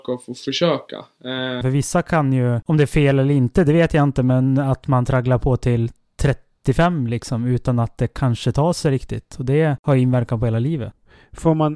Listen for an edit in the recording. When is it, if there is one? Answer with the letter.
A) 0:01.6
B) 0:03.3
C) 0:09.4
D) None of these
A